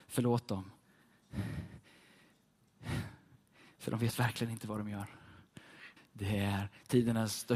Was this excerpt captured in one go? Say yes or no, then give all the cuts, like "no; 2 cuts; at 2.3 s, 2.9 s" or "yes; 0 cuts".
no; 1 cut; at 6.0 s